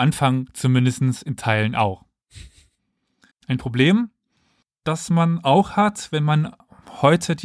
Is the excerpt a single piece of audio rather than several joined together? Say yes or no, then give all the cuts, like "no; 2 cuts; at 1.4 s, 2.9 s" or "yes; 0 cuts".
no; 1 cut; at 3.3 s